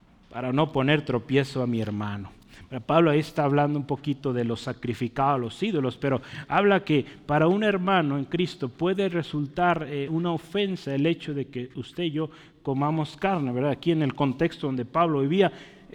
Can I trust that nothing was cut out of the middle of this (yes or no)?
yes